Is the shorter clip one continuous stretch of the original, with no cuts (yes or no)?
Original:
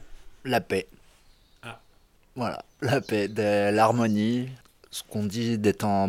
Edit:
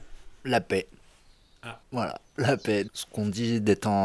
no